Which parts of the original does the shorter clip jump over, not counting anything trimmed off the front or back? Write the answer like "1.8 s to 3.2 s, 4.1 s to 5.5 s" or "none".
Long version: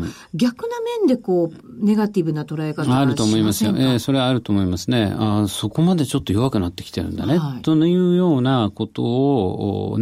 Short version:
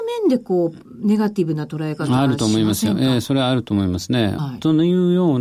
5.2 s to 7.4 s